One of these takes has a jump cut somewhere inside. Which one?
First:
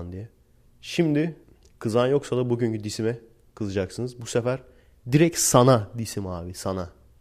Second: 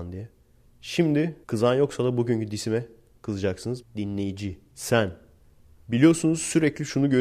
second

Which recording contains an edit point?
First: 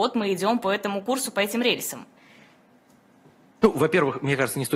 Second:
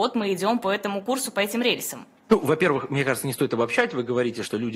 second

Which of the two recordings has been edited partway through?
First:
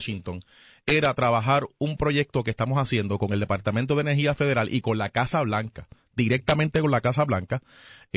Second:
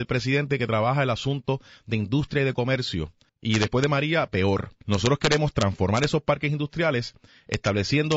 second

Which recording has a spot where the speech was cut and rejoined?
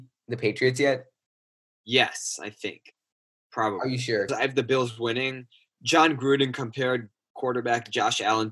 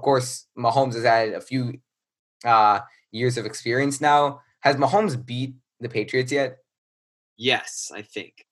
first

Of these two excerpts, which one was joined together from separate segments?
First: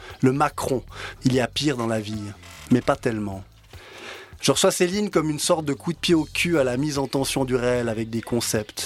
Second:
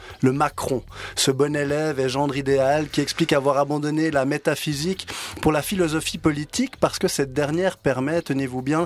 first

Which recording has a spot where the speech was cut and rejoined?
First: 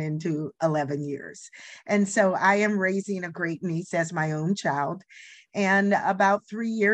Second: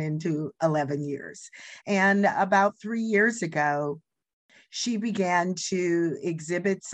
second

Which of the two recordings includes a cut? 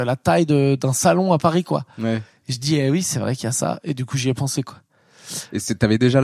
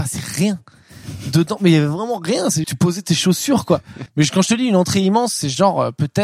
second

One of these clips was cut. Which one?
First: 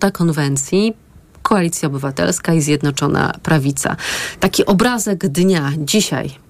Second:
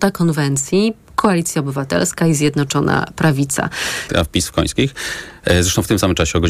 second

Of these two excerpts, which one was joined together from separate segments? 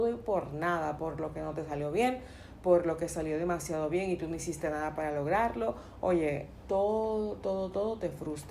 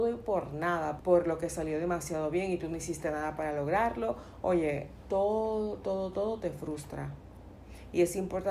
second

